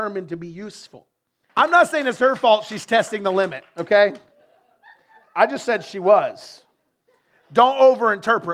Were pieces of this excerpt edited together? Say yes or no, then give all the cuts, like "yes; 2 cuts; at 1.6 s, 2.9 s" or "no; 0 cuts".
yes; 1 cut; at 1.5 s